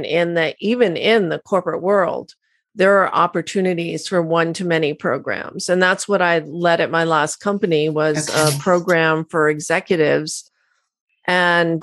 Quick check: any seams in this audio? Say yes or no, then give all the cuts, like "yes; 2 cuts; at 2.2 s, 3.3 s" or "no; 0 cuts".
no; 0 cuts